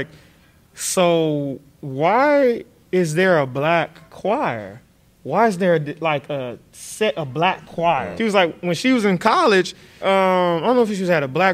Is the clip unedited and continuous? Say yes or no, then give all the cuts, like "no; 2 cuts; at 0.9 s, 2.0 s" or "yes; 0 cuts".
no; 2 cuts; at 8.2 s, 10.0 s